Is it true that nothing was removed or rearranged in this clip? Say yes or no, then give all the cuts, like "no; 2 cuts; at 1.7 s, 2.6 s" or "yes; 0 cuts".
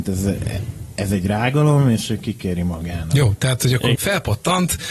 no; 1 cut; at 4.0 s